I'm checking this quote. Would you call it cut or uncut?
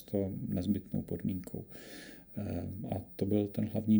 uncut